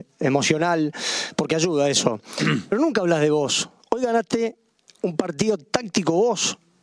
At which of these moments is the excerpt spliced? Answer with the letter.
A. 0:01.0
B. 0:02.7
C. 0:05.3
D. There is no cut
D